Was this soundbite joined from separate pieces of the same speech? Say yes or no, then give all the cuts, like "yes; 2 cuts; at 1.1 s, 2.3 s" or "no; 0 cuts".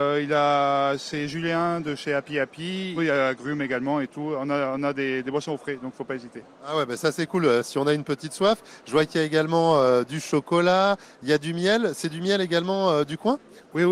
yes; 1 cut; at 3.0 s